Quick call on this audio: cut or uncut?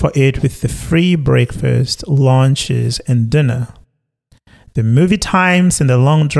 uncut